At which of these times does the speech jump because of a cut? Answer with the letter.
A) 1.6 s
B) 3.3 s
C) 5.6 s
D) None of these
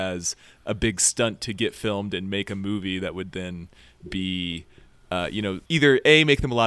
C